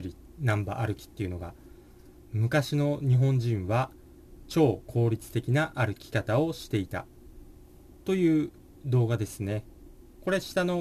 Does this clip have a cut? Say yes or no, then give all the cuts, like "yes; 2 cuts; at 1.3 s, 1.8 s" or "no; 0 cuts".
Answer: yes; 1 cut; at 2.2 s